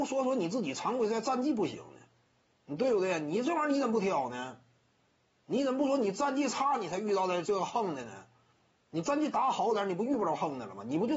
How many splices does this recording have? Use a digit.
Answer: 0